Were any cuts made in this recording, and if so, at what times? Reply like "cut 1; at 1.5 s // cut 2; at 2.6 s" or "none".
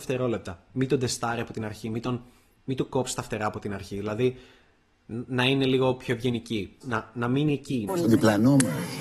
cut 1; at 6.8 s // cut 2; at 7.9 s